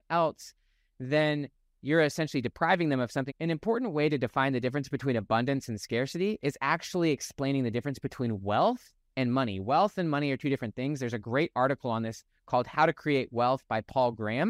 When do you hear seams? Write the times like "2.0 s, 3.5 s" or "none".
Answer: 3.3 s